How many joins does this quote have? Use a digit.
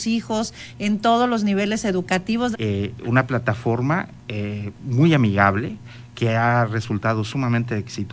1